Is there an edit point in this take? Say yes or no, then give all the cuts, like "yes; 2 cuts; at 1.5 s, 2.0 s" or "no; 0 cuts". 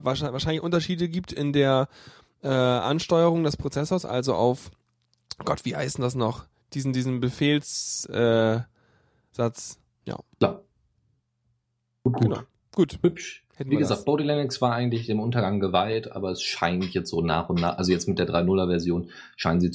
yes; 2 cuts; at 6.9 s, 9.9 s